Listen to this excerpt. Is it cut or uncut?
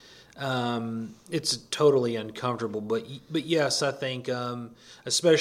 uncut